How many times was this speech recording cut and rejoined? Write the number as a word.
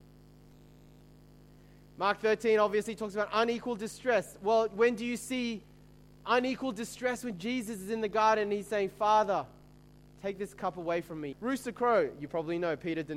one